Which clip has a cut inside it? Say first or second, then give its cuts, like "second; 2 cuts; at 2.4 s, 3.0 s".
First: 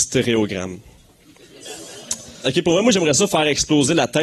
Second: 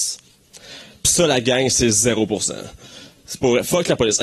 first; 1 cut; at 2.4 s